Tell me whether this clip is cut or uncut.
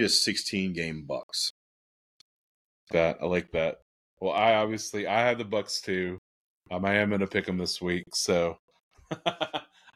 cut